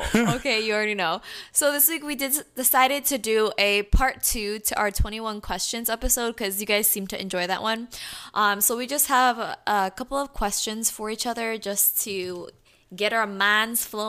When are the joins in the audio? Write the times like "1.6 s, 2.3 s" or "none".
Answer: none

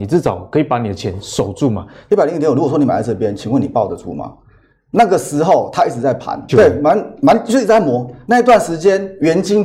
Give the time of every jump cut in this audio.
2.1 s, 6.5 s

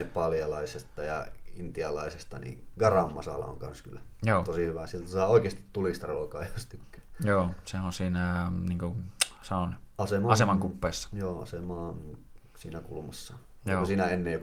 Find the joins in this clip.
none

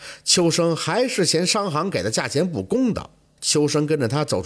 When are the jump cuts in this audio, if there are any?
3.4 s

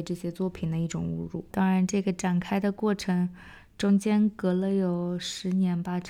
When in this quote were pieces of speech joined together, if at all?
1.5 s

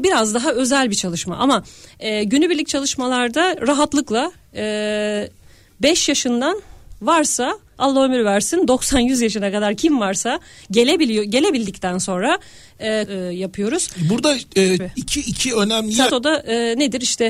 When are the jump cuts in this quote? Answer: 13.1 s, 14.8 s, 16.1 s

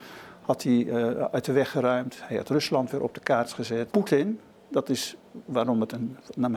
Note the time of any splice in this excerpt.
3.9 s

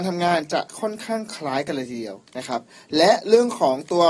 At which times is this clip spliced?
2.3 s

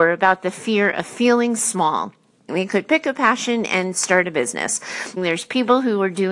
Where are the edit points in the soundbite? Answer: 2.5 s, 5.2 s

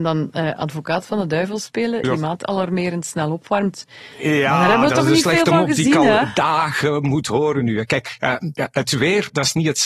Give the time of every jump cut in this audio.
2.0 s

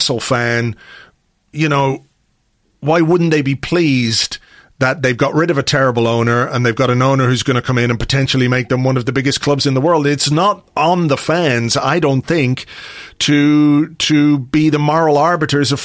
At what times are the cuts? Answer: none

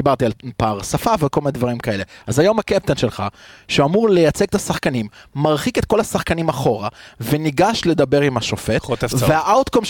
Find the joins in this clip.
none

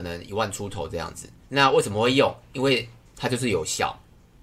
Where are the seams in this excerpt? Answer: 1.4 s

